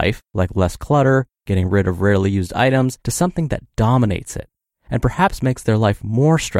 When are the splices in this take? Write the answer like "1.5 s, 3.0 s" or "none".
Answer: 3.0 s